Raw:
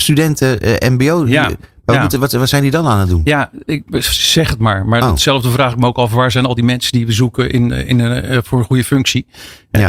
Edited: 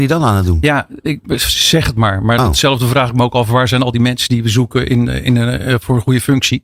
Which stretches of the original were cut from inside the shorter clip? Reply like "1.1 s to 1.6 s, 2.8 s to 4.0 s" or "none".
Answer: none